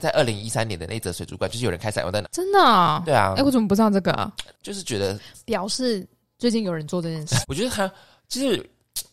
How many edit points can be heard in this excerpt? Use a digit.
3